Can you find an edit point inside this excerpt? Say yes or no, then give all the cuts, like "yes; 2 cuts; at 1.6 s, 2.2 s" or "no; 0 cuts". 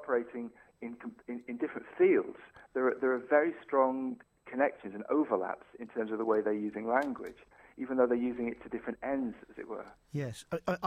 no; 0 cuts